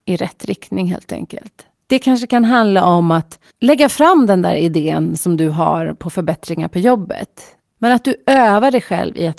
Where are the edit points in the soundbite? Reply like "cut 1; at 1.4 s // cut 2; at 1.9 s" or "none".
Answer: cut 1; at 1.7 s // cut 2; at 3.5 s // cut 3; at 7.8 s